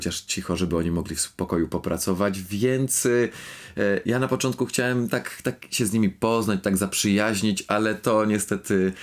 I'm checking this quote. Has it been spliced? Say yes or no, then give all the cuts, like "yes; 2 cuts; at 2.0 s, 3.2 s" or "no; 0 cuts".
no; 0 cuts